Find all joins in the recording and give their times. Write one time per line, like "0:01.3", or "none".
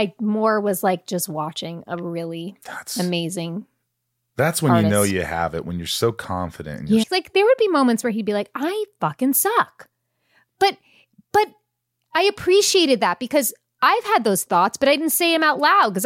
0:07.0

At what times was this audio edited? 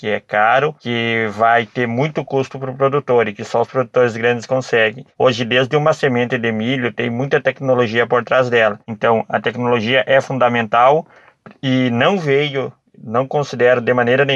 none

